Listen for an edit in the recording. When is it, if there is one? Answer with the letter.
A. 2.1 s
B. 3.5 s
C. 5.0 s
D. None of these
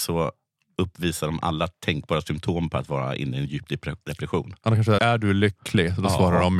C